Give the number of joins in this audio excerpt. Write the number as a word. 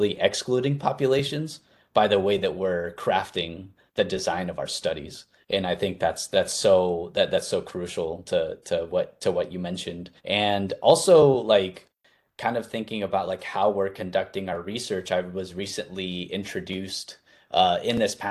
one